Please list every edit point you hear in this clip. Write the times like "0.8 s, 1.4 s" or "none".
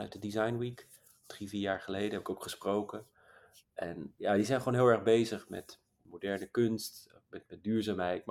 none